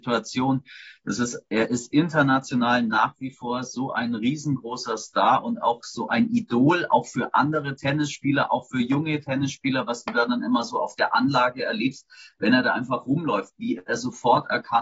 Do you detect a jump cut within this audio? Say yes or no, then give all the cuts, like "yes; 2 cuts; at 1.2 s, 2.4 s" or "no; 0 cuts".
no; 0 cuts